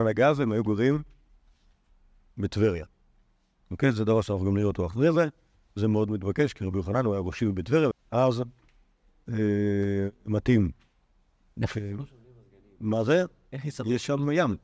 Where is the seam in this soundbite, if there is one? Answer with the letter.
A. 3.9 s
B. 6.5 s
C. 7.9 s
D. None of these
C